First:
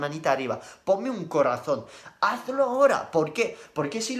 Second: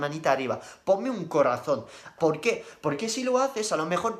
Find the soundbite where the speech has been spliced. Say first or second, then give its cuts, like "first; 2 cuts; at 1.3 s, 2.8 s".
second; 1 cut; at 2.2 s